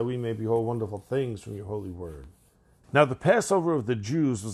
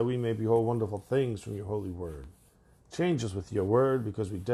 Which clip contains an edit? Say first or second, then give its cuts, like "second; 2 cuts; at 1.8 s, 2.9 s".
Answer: first; 1 cut; at 2.8 s